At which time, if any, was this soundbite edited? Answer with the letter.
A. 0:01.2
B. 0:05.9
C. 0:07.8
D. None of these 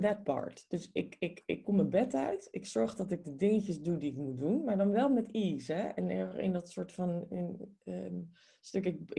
D